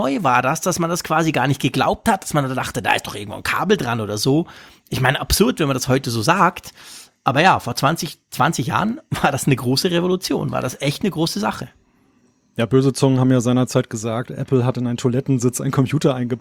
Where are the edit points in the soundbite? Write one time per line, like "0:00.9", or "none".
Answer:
none